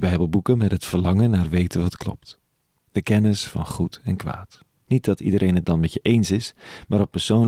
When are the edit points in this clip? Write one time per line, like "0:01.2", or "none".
0:04.9